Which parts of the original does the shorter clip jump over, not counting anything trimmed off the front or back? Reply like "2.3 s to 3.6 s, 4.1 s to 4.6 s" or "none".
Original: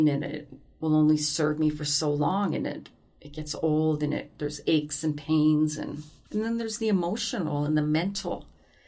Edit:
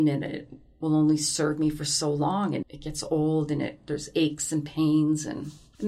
2.6 s to 3.1 s